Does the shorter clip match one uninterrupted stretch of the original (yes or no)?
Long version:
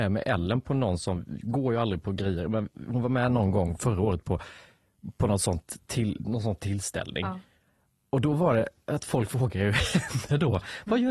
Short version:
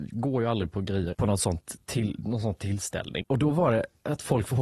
no